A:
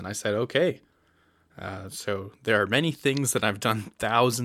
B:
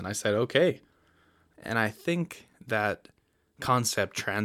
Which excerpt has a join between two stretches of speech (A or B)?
B